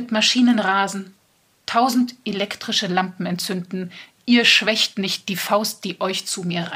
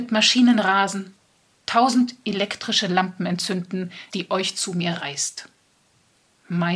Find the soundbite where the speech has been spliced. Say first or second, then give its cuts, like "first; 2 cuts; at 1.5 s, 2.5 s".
second; 1 cut; at 4.1 s